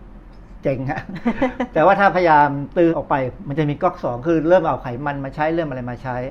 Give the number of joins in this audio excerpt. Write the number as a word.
one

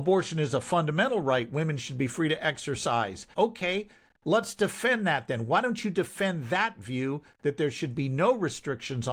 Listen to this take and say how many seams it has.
one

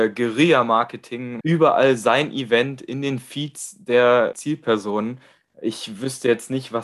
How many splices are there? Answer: two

